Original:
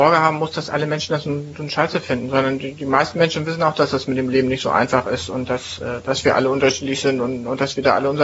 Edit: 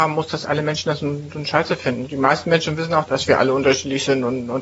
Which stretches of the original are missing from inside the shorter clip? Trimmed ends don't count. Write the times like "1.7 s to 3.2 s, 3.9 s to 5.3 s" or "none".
2.3 s to 2.7 s, 3.7 s to 6.0 s